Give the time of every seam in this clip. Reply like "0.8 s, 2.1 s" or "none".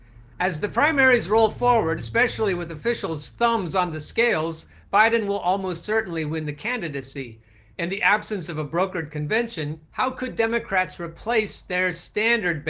none